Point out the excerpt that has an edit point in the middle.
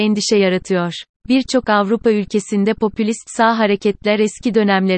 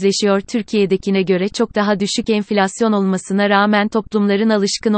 first; 1 cut; at 1.2 s

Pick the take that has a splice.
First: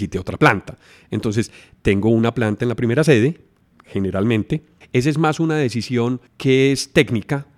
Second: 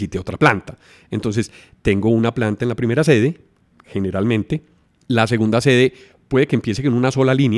first; 2 cuts; at 4.8 s, 6.3 s

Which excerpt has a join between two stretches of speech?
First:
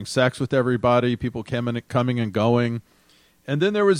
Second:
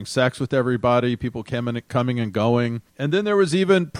second; 1 cut; at 2.9 s

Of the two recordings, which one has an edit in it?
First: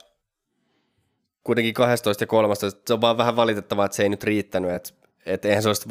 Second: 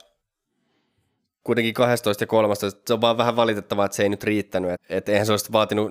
second; 1 cut; at 4.7 s

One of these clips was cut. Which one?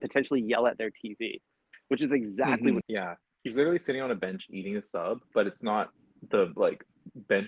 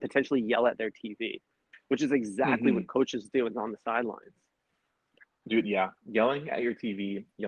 first; 1 cut; at 2.8 s

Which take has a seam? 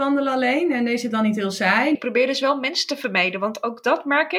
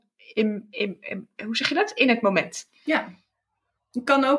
first; 1 cut; at 1.9 s

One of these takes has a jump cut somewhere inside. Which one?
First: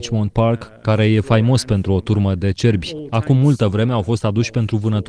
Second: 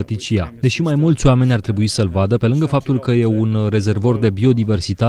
second; 1 cut; at 2.4 s

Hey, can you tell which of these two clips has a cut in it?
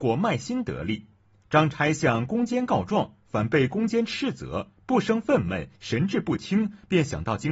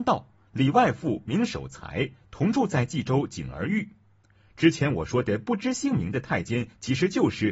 first; 1 cut; at 1.4 s

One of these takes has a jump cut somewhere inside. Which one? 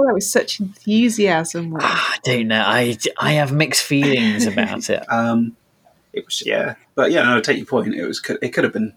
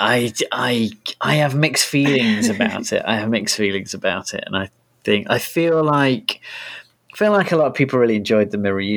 first; 3 cuts; at 3.1 s, 5.0 s, 6.4 s

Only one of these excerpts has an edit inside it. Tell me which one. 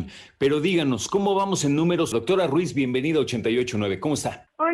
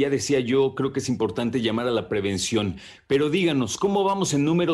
first; 1 cut; at 2.1 s

